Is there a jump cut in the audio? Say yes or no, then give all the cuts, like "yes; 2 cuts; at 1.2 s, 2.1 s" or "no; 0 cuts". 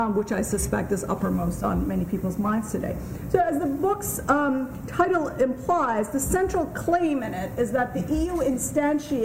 no; 0 cuts